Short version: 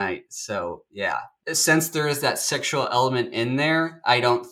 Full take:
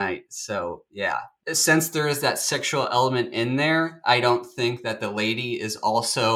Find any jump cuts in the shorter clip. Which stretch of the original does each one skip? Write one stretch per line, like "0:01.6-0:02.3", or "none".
none